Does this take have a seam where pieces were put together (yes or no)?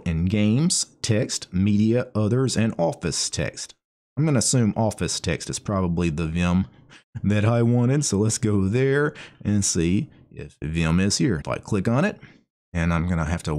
yes